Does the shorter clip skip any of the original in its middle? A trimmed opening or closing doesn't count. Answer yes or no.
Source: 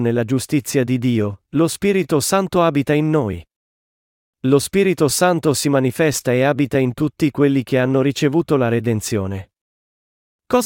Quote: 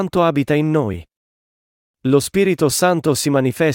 no